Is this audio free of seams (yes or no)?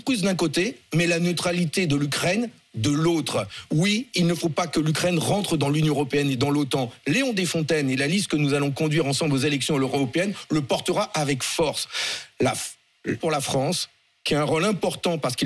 no